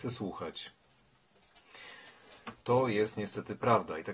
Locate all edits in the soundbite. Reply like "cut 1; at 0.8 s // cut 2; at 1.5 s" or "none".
cut 1; at 2.6 s